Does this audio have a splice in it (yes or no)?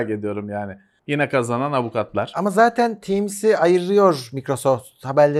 yes